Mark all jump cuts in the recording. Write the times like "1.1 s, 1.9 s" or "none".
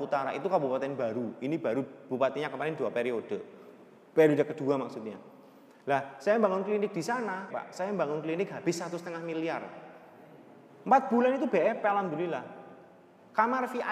7.5 s